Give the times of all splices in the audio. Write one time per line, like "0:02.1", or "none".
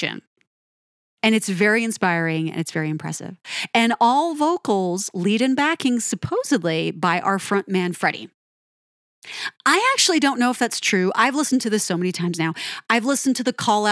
none